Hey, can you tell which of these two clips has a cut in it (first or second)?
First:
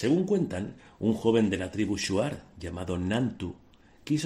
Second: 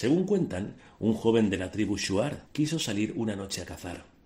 second